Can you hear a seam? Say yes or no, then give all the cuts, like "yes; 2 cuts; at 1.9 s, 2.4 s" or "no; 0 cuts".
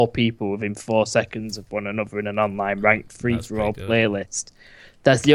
no; 0 cuts